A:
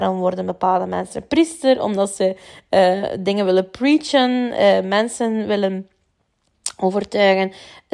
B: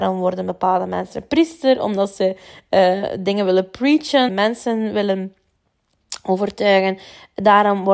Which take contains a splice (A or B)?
B